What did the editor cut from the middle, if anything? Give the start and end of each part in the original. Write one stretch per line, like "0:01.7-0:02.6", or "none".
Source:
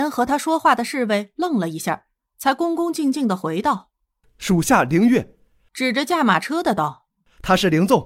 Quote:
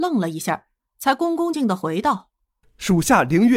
0:02.9-0:03.1